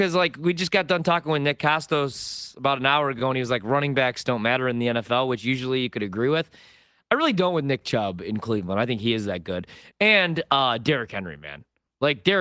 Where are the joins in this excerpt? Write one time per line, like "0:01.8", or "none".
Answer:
none